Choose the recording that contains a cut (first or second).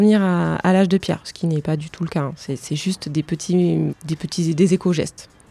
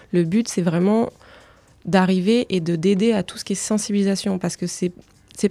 first